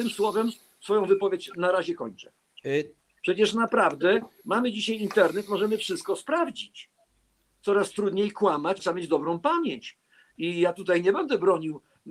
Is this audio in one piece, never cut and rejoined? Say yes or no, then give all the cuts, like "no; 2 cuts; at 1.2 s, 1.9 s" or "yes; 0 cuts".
no; 2 cuts; at 3.2 s, 8.8 s